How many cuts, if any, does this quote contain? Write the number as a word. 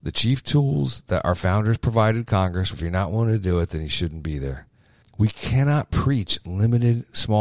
two